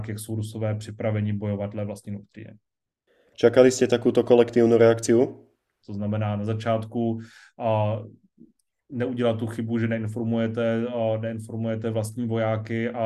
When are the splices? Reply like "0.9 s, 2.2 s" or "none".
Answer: 3.3 s, 5.8 s